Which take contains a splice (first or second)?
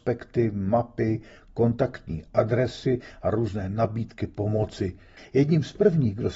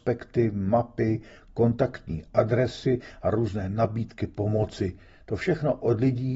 first